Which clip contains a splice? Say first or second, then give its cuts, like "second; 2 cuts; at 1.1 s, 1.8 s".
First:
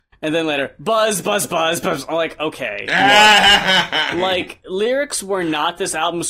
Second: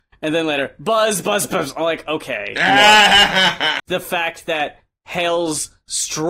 second; 2 cuts; at 1.5 s, 3.8 s